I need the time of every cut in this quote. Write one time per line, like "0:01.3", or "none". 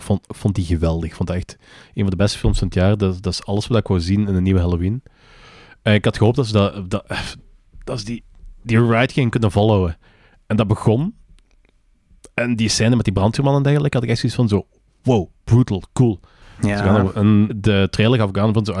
0:17.5